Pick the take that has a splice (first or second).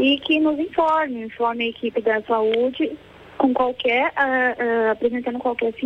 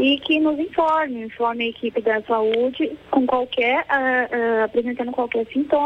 second